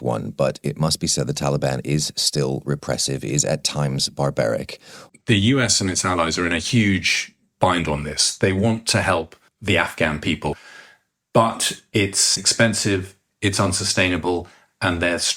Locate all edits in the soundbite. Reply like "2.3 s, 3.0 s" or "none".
5.1 s